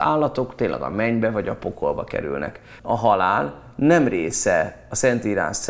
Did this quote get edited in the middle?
yes; 1 cut; at 2.8 s

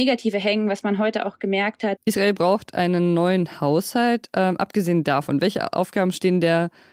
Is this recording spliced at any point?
yes; 1 cut; at 2.0 s

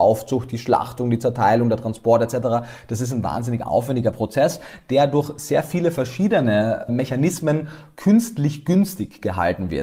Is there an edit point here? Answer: yes; 1 cut; at 6.9 s

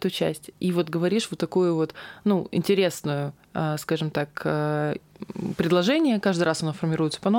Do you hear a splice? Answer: no; 0 cuts

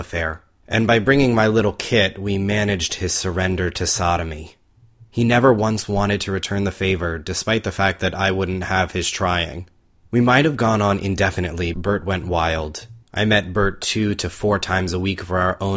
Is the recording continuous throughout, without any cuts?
no; 2 cuts; at 11.7 s, 13.0 s

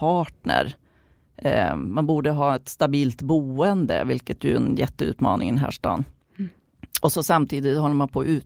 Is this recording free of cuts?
yes; 0 cuts

